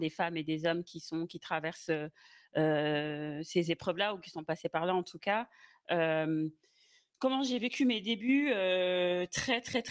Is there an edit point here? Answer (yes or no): no